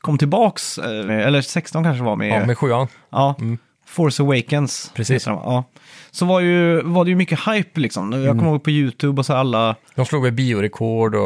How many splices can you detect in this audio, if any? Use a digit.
1